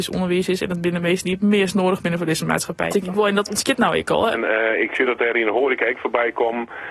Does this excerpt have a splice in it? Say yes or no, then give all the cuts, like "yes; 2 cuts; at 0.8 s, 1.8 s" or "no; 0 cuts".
yes; 2 cuts; at 2.9 s, 4.3 s